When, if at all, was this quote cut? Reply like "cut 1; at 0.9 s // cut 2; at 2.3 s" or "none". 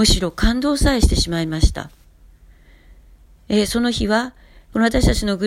none